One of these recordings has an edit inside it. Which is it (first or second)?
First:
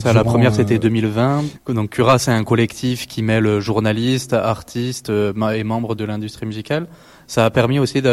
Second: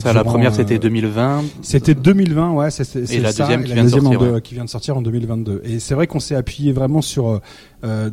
first